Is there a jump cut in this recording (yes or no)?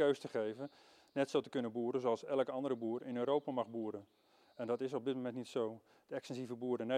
no